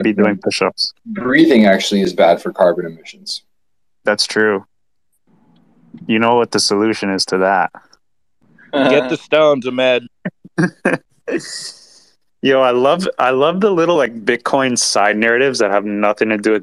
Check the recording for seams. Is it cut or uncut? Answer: uncut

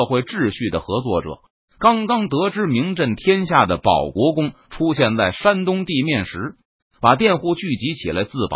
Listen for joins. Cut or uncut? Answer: cut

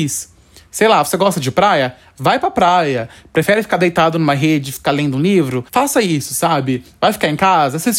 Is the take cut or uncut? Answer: cut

